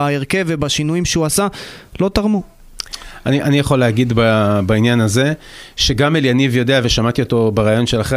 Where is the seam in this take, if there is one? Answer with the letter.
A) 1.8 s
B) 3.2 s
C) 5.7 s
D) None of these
D